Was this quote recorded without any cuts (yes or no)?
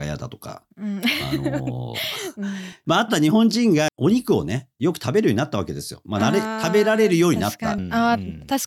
no